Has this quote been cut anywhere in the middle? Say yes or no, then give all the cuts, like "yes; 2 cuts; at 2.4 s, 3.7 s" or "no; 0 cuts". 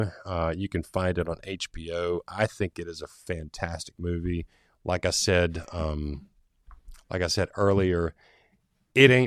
no; 0 cuts